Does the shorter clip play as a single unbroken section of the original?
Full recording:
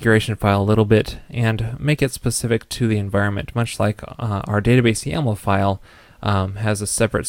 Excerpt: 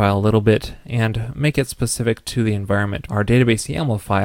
no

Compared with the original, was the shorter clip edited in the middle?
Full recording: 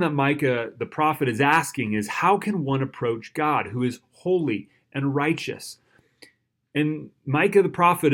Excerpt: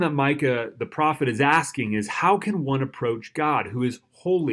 no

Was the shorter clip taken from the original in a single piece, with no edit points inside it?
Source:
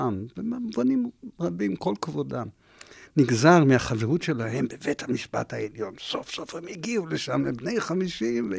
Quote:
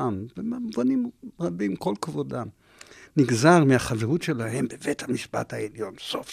yes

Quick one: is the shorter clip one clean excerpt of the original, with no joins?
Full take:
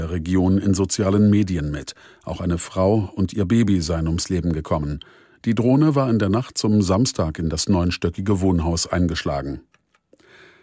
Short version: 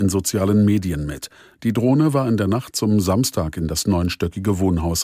no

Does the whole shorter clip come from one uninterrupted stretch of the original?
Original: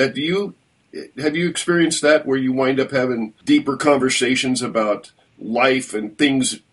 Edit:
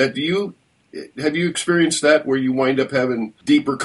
yes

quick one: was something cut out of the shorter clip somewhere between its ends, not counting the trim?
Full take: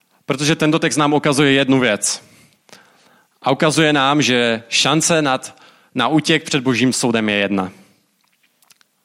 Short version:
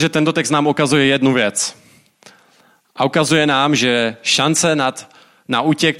no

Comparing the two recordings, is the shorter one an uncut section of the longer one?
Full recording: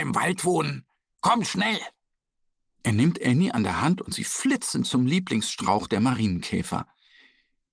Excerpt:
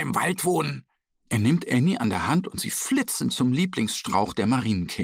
no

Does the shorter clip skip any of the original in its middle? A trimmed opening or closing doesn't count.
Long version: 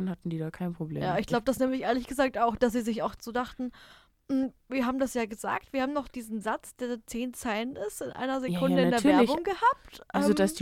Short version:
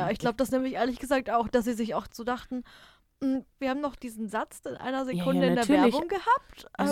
yes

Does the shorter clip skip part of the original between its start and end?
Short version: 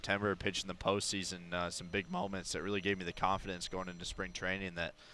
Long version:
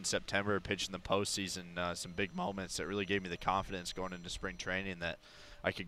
no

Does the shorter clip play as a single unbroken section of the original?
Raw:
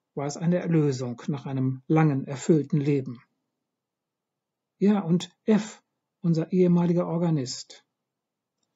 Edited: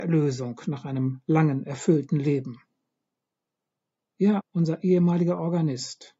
no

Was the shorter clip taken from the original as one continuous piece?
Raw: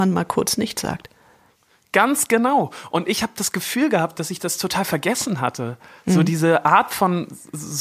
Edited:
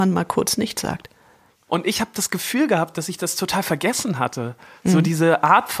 no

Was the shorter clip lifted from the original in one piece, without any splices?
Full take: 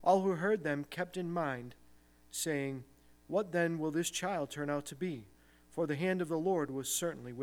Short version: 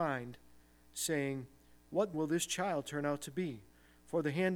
no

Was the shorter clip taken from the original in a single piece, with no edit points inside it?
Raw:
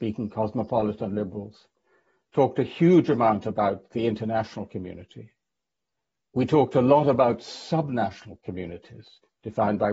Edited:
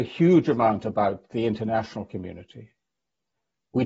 yes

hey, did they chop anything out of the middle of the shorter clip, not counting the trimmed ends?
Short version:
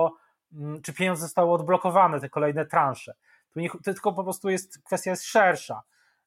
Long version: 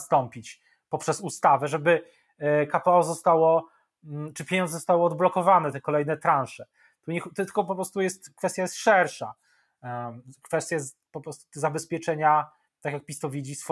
no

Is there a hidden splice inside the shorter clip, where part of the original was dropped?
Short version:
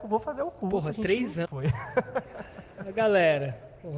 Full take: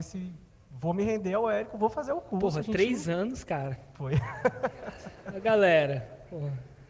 yes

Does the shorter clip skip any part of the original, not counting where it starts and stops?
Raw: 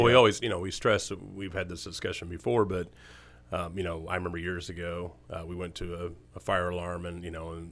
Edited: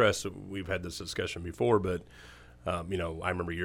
no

